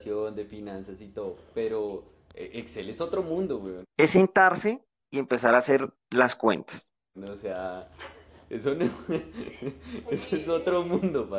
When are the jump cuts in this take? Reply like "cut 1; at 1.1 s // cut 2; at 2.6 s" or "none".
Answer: cut 1; at 3.8 s // cut 2; at 7.1 s